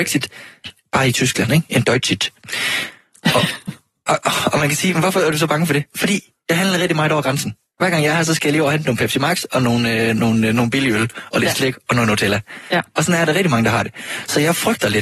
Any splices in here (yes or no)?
no